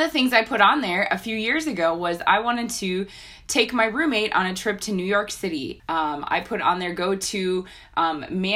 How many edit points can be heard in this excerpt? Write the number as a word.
one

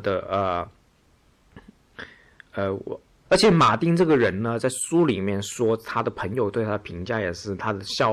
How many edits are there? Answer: one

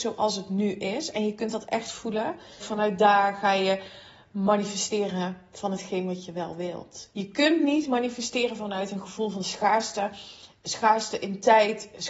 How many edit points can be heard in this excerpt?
one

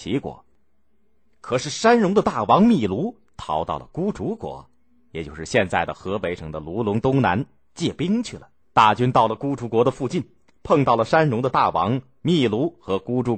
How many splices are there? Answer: one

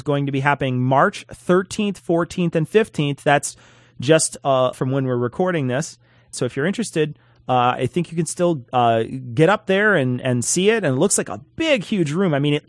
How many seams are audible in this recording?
three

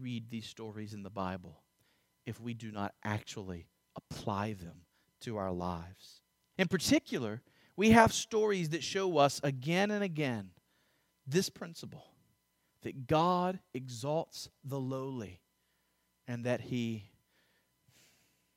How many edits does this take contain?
one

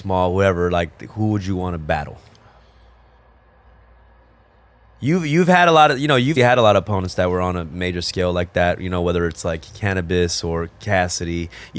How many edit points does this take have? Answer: one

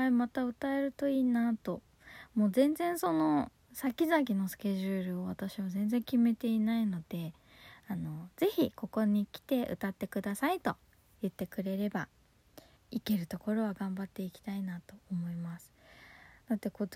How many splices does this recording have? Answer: one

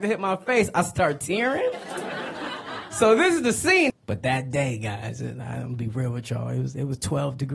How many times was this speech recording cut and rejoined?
one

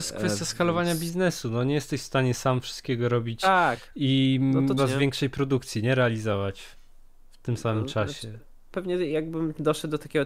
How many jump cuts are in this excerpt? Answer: two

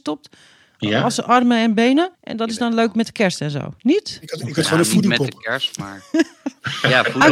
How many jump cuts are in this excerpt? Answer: one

